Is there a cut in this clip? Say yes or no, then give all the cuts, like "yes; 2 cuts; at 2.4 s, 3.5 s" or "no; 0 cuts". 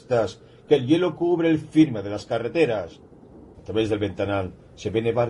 yes; 1 cut; at 3.5 s